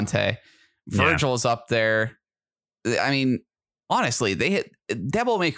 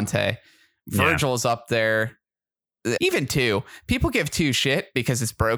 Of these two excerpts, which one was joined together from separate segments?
second; 1 cut; at 3.0 s

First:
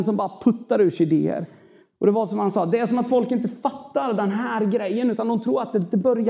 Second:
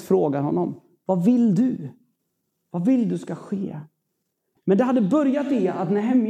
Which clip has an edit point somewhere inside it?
second; 1 cut; at 4.6 s

